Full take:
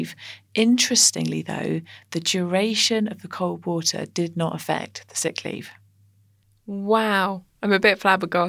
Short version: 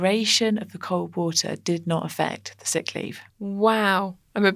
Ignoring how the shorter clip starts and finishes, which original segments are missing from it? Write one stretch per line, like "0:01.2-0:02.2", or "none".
0:05.8-0:06.6